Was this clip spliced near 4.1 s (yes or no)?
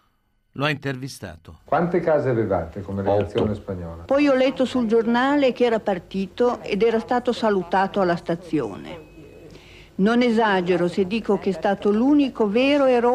yes